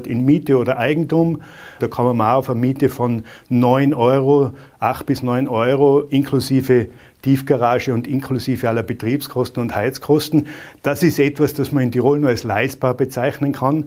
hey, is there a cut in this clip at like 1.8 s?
yes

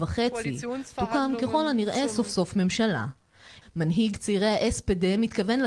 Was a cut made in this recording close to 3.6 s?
yes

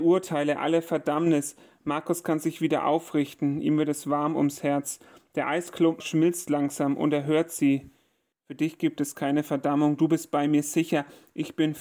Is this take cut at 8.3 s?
yes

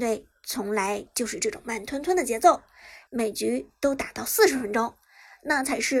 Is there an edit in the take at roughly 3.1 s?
yes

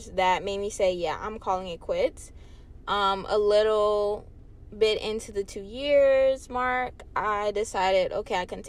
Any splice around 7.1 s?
no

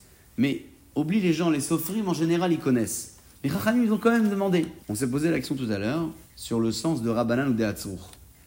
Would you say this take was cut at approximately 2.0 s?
no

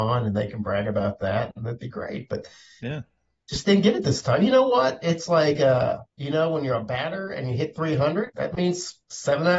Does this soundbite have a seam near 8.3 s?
yes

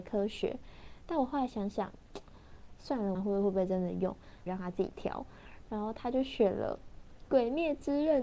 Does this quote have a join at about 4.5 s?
yes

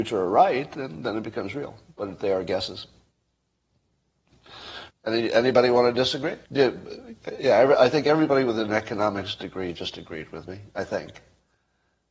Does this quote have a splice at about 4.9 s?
yes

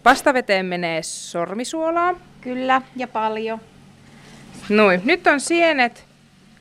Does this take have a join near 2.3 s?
no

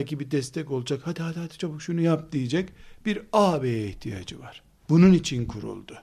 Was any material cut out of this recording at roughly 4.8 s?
yes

